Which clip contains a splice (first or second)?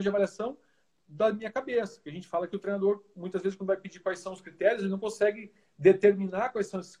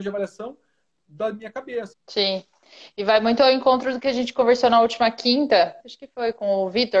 second